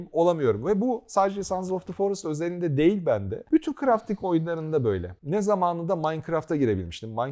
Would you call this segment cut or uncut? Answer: uncut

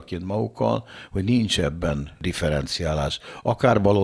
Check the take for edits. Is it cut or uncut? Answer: uncut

